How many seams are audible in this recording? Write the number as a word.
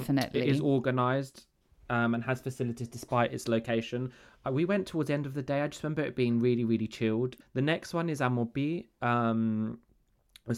one